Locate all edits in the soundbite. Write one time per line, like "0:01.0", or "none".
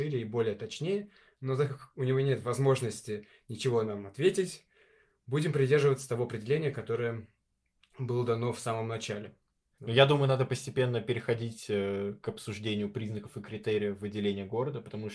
0:09.7